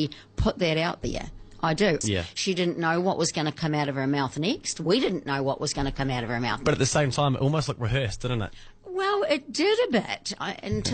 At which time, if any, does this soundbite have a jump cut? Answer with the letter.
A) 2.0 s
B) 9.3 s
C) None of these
A